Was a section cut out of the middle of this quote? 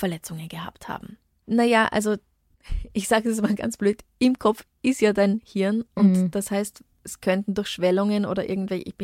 yes; 2 cuts; at 1.4 s, 6.9 s

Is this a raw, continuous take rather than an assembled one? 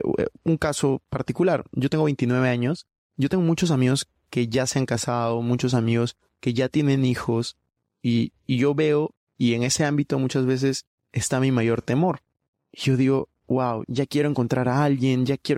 no; 2 cuts; at 8.4 s, 13.8 s

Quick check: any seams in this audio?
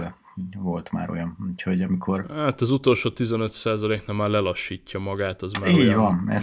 no; 0 cuts

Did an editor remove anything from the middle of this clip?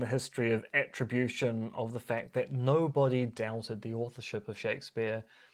no; 0 cuts

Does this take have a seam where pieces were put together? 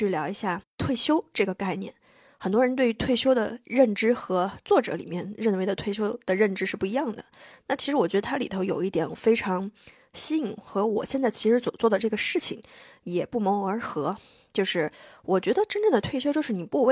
no; 0 cuts

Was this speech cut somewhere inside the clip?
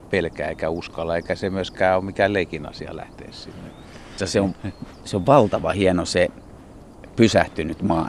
yes; 1 cut; at 4.2 s

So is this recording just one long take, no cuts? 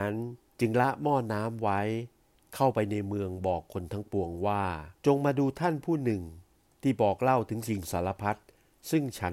no; 1 cut; at 5.0 s

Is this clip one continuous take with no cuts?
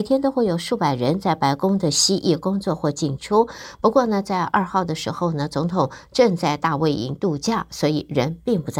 yes; 0 cuts

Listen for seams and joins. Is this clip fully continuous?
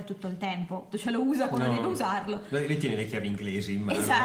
no; 1 cut; at 0.9 s

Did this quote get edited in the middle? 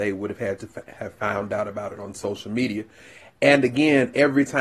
no; 0 cuts

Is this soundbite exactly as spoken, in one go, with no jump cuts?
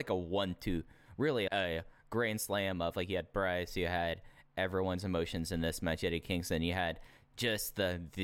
no; 1 cut; at 1.5 s

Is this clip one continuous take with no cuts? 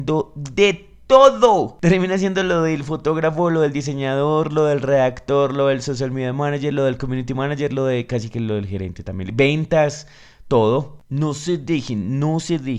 yes; 0 cuts

